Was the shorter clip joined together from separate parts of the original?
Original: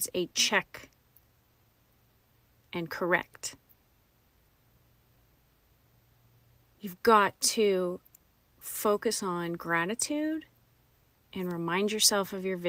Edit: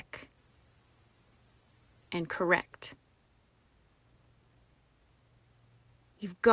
no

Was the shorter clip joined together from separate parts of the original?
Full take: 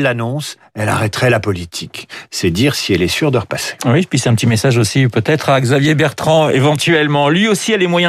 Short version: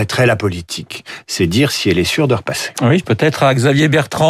yes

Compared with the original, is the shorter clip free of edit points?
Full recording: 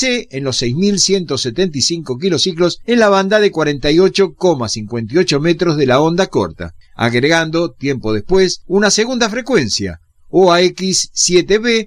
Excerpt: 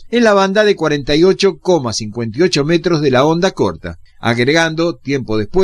yes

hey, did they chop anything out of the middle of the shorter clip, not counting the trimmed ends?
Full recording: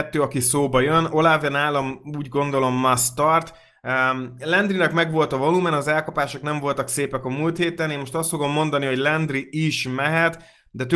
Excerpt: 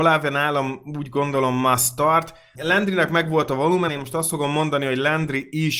yes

